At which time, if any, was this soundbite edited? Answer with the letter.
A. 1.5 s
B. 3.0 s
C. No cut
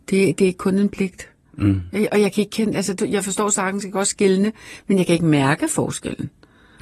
B